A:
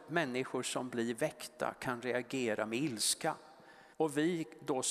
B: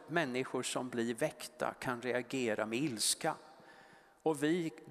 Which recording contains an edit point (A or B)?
A